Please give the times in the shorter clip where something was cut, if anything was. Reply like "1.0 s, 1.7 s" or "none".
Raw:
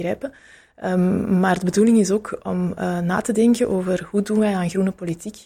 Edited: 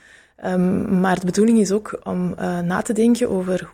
none